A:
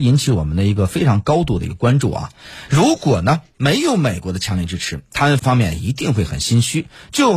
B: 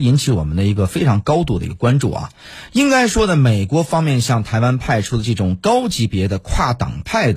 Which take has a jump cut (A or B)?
A